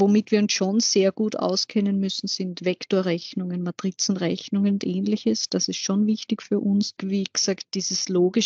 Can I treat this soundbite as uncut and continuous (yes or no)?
yes